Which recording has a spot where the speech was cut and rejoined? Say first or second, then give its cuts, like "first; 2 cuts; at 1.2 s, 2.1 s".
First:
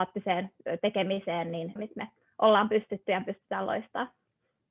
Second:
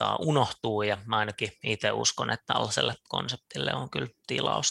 first; 1 cut; at 1.8 s